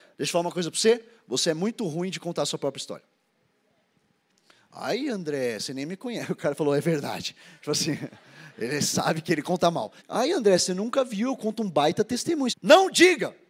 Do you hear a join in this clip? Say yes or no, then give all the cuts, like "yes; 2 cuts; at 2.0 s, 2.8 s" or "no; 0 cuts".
yes; 2 cuts; at 10.0 s, 12.5 s